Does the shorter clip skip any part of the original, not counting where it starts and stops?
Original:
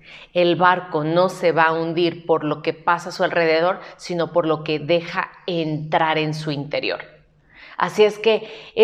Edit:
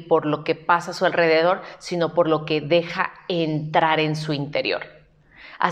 no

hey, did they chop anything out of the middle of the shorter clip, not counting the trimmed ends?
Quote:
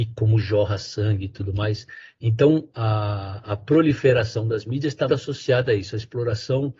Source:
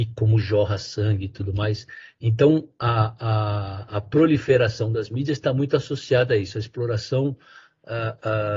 yes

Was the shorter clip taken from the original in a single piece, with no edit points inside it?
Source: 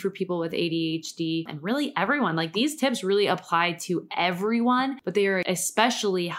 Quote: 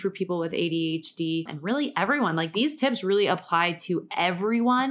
yes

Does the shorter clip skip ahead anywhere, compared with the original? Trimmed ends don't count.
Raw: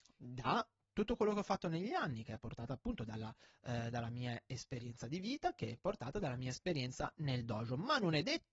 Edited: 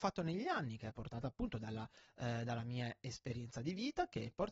no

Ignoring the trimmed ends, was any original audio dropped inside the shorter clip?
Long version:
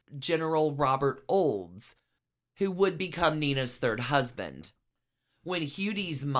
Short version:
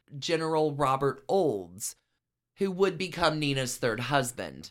no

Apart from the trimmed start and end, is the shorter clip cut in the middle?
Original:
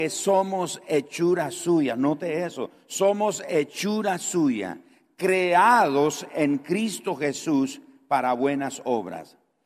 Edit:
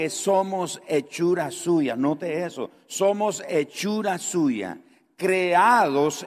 no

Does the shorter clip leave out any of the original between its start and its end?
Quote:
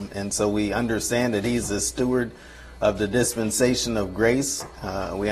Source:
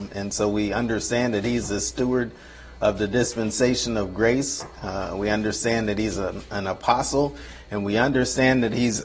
no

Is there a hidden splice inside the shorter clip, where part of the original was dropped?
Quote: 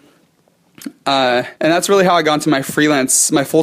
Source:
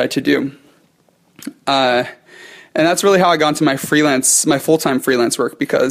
yes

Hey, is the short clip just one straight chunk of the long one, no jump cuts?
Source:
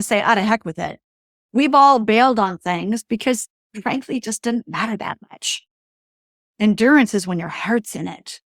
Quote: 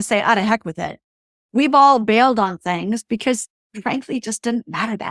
yes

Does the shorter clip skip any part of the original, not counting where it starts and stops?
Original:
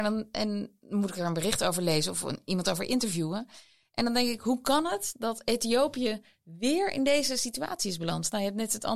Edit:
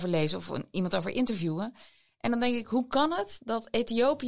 no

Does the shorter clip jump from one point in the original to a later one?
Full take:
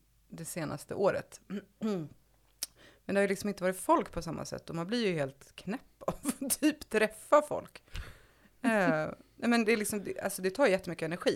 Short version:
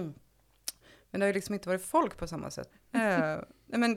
yes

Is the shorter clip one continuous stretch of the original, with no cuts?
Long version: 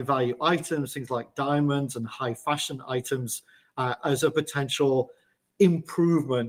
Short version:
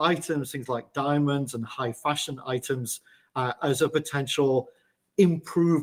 yes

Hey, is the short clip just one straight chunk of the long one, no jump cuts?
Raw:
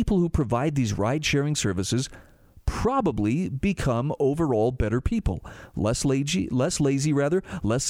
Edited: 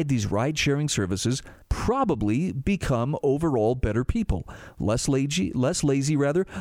no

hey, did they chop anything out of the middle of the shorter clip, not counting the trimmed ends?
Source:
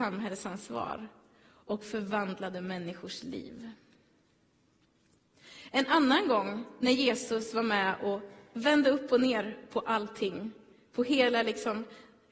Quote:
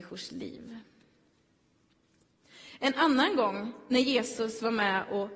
no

